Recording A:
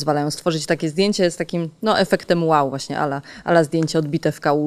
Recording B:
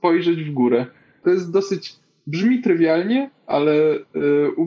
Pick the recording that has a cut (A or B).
B